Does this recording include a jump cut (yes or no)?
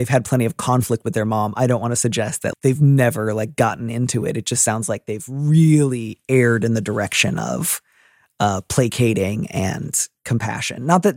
yes